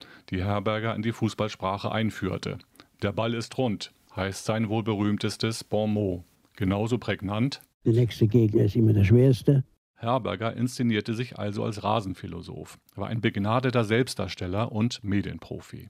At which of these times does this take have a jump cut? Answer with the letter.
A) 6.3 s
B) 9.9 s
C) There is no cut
C